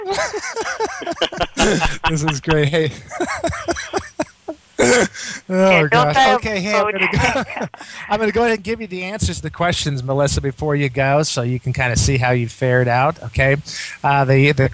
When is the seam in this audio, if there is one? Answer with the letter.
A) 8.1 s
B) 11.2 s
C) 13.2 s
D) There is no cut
D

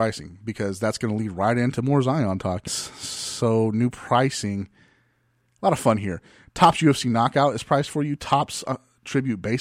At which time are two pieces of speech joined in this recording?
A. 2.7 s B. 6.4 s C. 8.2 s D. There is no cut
A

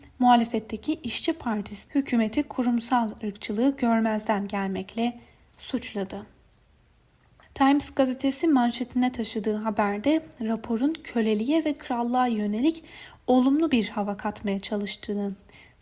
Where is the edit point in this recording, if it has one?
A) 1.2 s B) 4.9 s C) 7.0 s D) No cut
D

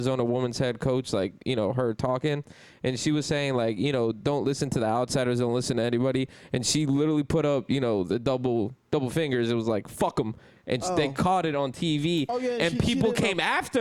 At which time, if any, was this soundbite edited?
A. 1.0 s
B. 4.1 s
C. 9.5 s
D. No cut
D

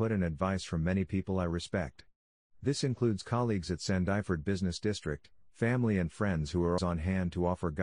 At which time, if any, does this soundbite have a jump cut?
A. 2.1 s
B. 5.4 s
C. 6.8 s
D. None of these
C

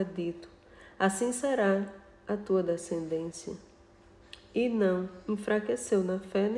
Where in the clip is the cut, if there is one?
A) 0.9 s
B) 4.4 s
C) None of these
C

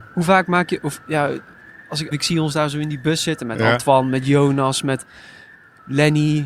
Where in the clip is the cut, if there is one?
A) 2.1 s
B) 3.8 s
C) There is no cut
A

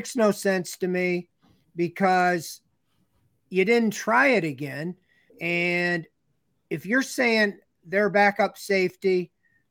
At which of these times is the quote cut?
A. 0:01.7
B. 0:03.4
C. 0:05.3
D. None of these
C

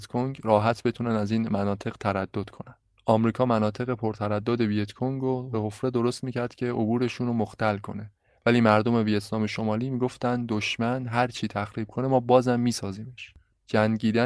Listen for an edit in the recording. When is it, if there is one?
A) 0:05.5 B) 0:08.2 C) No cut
A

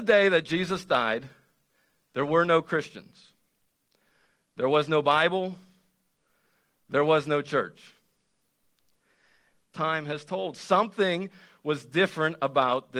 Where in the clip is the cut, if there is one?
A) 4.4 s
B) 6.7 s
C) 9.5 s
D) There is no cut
C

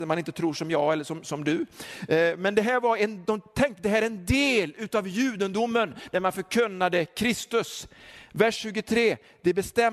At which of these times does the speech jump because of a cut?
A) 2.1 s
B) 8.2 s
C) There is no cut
C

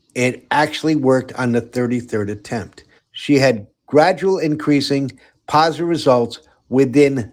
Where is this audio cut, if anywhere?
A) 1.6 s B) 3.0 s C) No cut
B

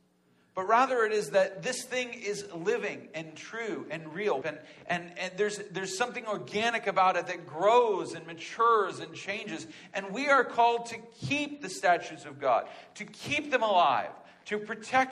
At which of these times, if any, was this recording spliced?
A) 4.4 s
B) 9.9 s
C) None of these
A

